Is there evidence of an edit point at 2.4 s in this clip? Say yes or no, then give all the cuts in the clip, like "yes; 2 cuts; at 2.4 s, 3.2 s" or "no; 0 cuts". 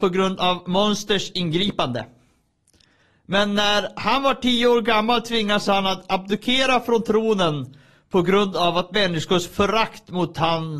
no; 0 cuts